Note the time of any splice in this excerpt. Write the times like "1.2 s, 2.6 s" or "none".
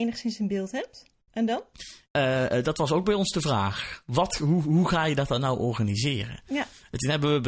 2.0 s